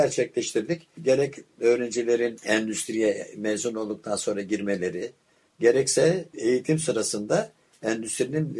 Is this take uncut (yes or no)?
yes